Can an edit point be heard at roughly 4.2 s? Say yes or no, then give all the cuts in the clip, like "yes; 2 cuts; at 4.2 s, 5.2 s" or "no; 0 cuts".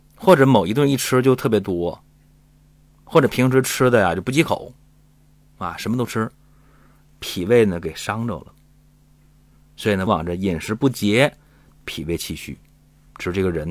no; 1 cut; at 10.1 s